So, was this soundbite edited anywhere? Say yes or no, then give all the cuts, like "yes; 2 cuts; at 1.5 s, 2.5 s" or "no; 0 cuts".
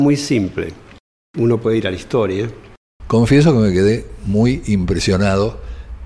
yes; 2 cuts; at 1.3 s, 3.0 s